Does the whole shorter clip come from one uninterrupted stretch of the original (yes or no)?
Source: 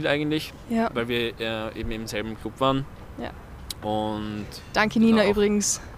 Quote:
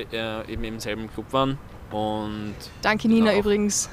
no